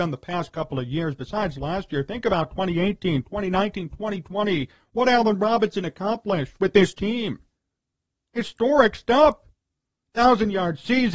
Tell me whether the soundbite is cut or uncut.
uncut